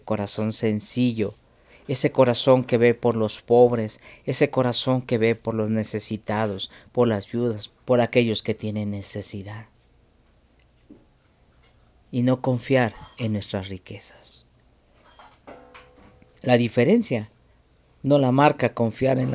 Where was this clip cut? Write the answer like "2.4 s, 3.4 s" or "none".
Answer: 7.7 s